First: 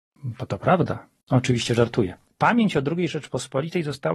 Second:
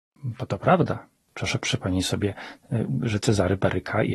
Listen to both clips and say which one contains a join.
first; 1 cut; at 1.2 s

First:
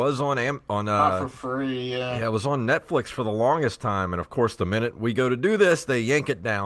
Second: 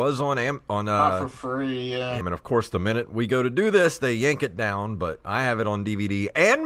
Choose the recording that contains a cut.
second; 1 cut; at 2.2 s

